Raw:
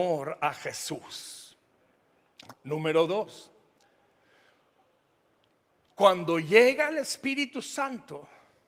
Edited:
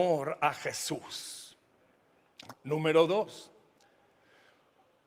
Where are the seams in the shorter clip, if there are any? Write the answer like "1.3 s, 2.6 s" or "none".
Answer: none